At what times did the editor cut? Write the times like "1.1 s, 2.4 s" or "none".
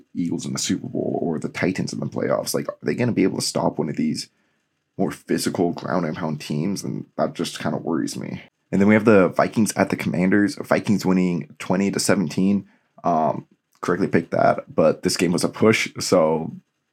none